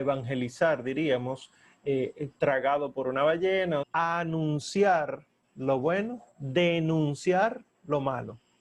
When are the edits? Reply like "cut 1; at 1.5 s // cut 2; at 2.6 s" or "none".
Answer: cut 1; at 3.8 s // cut 2; at 6.3 s